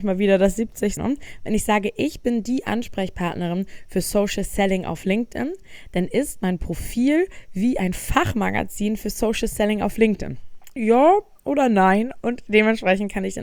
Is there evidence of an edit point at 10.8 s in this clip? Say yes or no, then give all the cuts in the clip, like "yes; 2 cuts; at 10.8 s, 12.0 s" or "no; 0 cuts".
yes; 2 cuts; at 1.0 s, 10.8 s